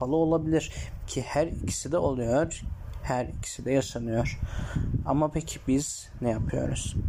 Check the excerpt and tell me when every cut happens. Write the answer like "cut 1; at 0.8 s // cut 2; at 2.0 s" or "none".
cut 1; at 1.0 s